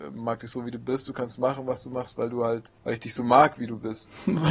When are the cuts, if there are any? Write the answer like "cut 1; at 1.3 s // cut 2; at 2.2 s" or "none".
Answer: cut 1; at 2.8 s